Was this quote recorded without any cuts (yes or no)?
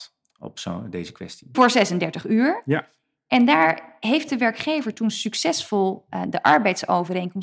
no